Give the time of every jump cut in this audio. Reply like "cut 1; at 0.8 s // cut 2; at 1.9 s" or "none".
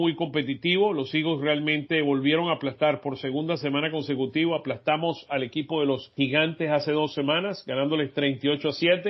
none